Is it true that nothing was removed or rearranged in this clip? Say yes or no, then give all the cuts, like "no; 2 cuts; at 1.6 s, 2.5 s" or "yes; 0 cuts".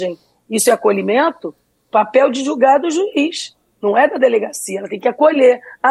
yes; 0 cuts